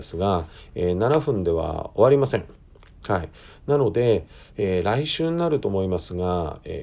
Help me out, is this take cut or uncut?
uncut